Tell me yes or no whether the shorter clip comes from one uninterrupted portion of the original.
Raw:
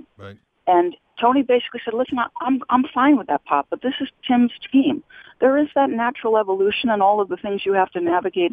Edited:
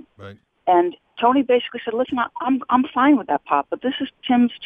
yes